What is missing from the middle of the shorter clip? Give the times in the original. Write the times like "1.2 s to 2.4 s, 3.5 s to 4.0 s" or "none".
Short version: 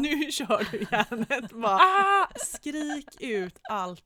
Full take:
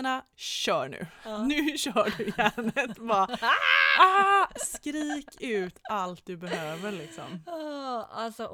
3.2 s to 4.0 s